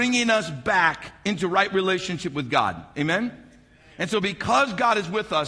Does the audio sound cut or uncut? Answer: uncut